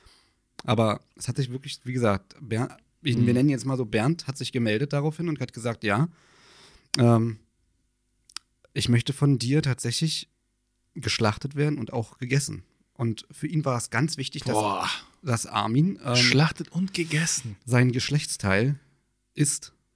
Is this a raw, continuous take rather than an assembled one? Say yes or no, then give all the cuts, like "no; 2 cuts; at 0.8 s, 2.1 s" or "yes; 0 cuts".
yes; 0 cuts